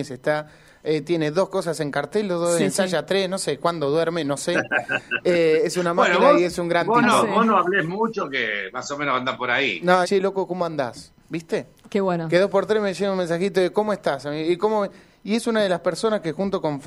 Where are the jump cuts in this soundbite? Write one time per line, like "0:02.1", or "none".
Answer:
0:02.6
0:10.0